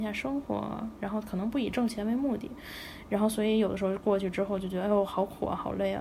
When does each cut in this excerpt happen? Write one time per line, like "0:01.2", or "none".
none